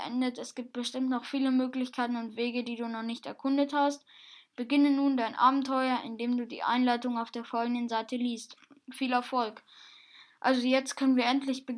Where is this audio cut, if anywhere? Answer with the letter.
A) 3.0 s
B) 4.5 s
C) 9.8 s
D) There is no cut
D